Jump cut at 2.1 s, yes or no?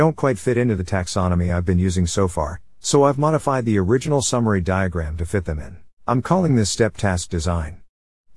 no